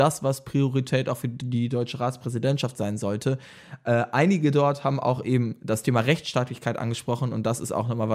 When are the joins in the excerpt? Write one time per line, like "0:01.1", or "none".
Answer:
none